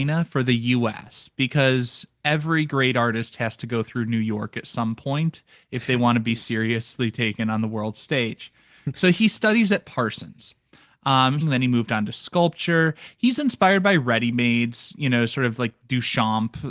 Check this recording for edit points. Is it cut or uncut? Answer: cut